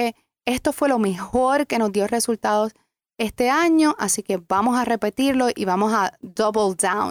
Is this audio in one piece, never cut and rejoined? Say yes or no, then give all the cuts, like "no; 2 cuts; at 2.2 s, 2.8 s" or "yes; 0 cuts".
yes; 0 cuts